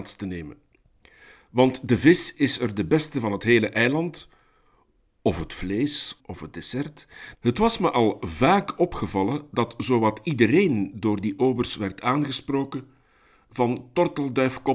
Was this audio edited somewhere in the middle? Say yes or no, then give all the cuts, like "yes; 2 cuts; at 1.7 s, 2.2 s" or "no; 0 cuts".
yes; 2 cuts; at 6.2 s, 7.3 s